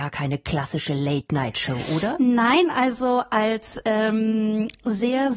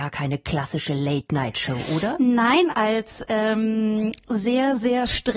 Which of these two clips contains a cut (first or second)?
second